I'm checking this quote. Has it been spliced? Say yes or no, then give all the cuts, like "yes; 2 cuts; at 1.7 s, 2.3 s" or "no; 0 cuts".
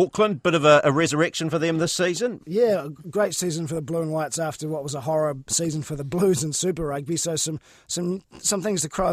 yes; 1 cut; at 2.4 s